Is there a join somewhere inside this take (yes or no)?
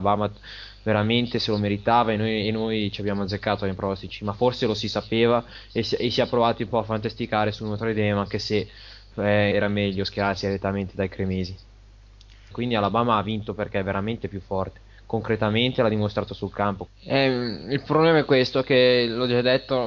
yes